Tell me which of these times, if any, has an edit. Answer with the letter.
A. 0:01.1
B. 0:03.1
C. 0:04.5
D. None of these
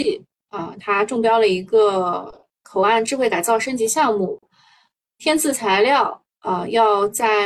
D